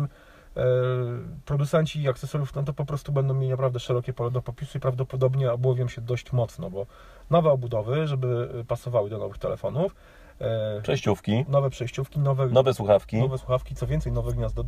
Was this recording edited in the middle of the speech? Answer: no; 0 cuts

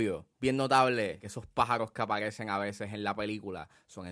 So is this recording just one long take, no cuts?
yes; 0 cuts

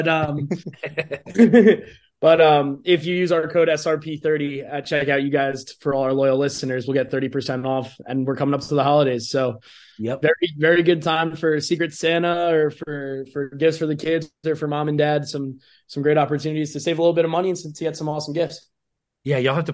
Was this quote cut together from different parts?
no; 0 cuts

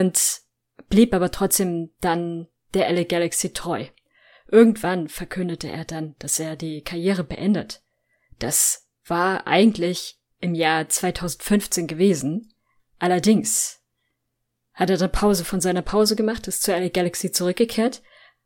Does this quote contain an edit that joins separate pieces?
no; 0 cuts

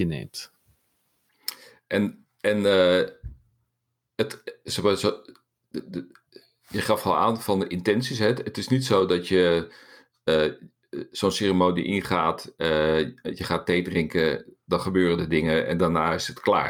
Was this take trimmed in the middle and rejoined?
no; 0 cuts

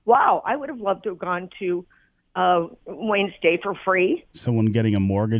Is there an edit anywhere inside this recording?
yes; 1 cut; at 4.3 s

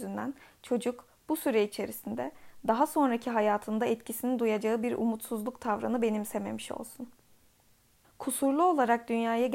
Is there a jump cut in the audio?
yes; 1 cut; at 8.0 s

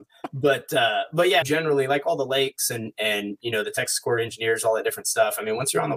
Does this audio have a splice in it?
yes; 1 cut; at 1.4 s

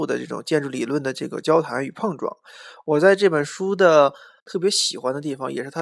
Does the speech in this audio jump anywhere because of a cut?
yes; 1 cut; at 4.4 s

